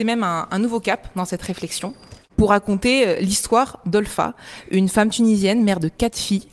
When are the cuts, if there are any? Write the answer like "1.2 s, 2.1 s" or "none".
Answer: none